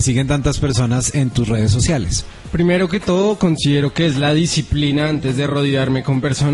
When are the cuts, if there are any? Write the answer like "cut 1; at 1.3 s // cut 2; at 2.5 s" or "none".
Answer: none